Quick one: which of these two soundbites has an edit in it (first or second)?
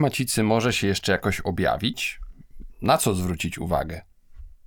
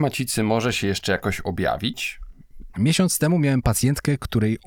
second